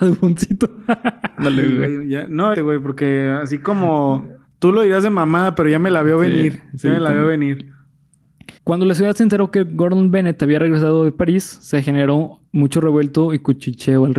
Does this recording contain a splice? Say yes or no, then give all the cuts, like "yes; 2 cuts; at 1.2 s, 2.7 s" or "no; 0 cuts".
yes; 2 cuts; at 2.5 s, 8.6 s